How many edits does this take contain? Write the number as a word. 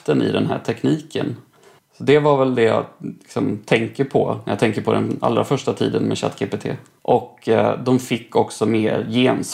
two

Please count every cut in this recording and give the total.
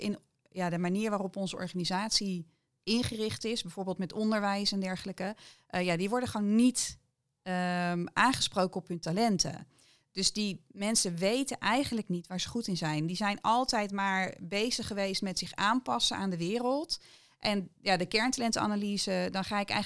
zero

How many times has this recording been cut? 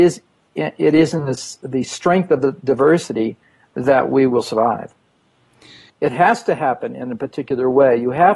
one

